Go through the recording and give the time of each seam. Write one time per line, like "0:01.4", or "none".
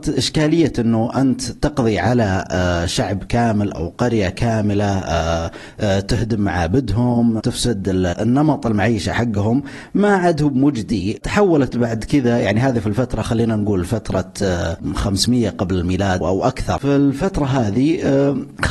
0:16.2